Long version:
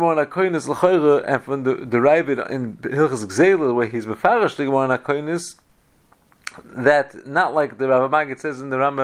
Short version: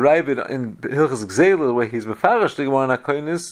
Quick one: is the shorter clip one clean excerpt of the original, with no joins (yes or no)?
yes